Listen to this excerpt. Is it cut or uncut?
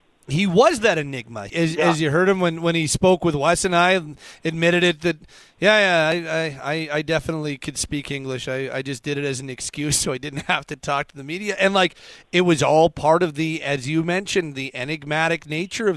cut